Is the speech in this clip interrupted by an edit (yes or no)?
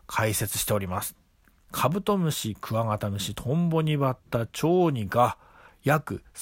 no